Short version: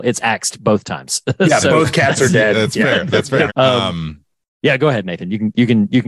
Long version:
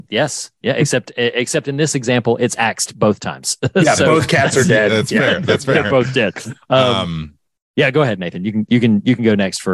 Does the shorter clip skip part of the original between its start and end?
yes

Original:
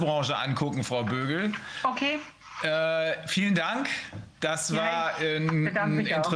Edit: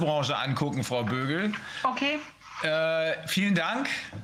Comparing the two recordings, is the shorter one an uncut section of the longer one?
yes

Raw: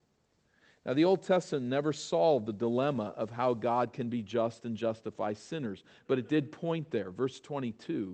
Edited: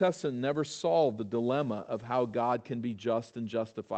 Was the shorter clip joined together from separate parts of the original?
no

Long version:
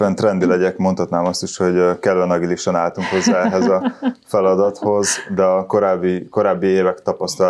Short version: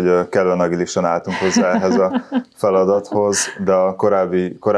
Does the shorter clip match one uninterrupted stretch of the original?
yes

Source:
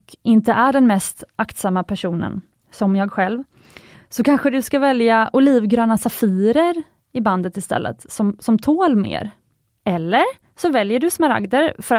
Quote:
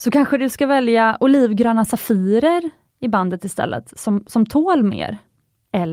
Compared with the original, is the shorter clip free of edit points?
yes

